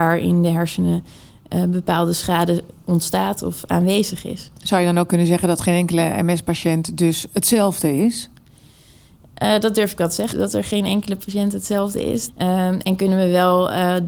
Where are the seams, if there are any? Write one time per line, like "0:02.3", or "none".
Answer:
0:10.3
0:12.3